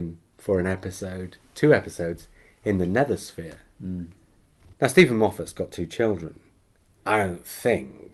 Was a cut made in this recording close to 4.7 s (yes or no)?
yes